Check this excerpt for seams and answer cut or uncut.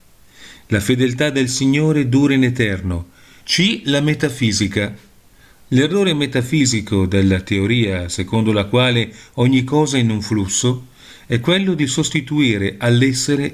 cut